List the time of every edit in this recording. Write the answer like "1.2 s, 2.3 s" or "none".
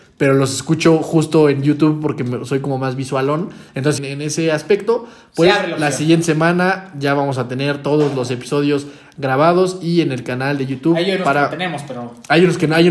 4.0 s